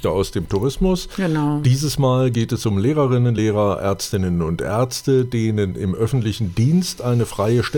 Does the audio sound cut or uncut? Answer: uncut